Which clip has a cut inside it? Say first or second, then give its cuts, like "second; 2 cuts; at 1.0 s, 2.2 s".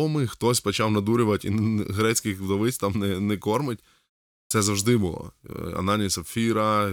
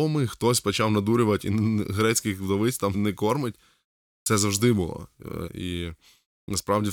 second; 2 cuts; at 2.9 s, 5.5 s